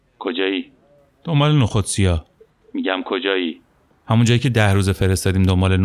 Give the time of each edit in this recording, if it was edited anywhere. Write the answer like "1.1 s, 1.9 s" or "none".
3.9 s

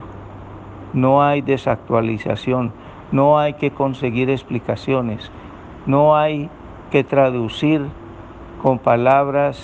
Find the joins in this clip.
none

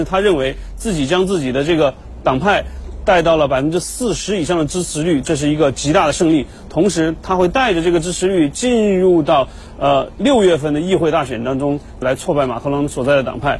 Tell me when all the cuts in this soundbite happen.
12.0 s

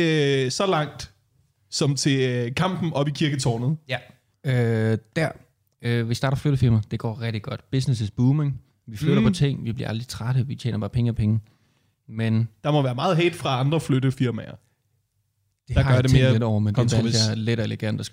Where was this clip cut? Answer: 4.3 s

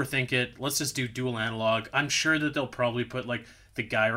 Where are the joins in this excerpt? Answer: none

